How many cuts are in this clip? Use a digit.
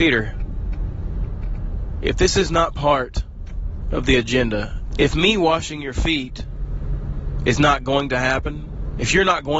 1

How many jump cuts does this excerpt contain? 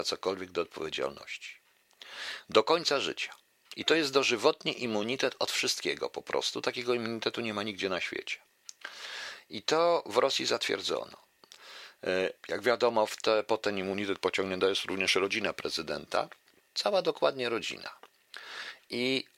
2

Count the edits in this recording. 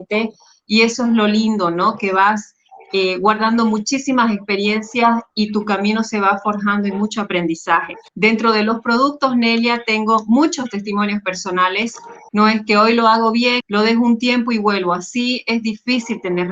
3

